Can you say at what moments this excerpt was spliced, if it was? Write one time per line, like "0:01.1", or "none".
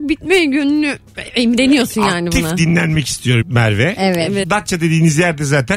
0:03.4
0:04.4